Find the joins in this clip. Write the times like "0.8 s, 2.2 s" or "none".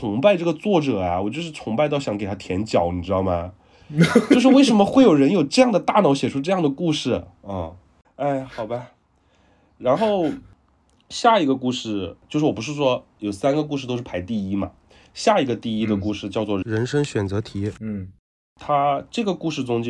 8.0 s